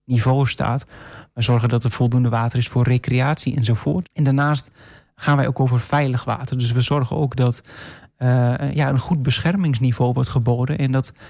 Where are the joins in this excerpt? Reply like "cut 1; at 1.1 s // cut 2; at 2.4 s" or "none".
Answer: cut 1; at 1.3 s // cut 2; at 4.0 s